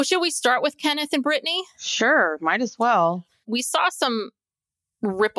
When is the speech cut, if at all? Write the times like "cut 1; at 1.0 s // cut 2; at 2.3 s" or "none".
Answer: cut 1; at 3.4 s